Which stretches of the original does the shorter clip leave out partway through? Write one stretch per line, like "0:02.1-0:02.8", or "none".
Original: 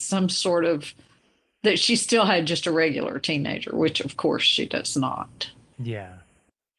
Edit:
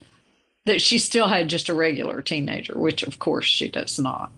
none